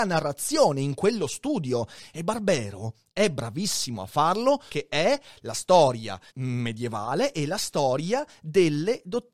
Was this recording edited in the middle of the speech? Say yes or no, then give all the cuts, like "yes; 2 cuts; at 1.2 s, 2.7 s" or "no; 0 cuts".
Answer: yes; 2 cuts; at 4.7 s, 6.3 s